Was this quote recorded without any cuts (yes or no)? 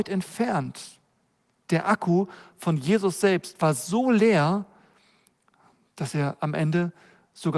yes